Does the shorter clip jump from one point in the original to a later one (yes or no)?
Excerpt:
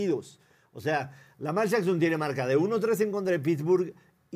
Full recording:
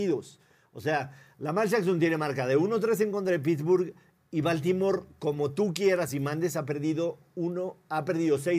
no